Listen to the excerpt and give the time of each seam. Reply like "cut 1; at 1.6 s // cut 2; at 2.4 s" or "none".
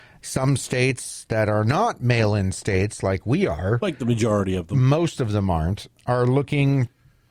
none